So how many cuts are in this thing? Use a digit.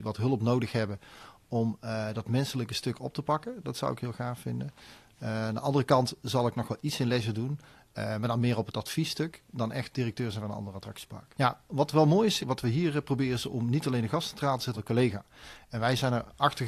3